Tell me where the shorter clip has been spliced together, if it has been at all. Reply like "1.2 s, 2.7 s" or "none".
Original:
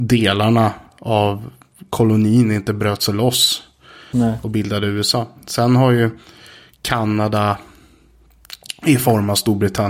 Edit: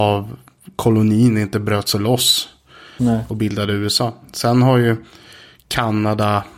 none